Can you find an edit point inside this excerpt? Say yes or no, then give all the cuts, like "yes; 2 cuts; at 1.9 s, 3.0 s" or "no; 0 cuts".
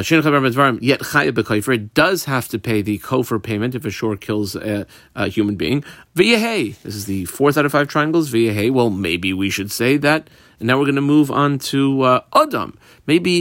yes; 1 cut; at 6.1 s